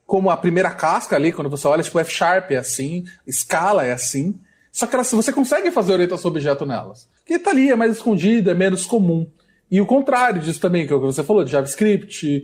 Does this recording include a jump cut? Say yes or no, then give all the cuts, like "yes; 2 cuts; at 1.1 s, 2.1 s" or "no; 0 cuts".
no; 0 cuts